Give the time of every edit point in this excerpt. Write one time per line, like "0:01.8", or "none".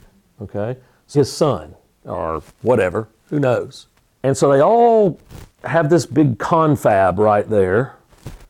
0:01.1
0:04.1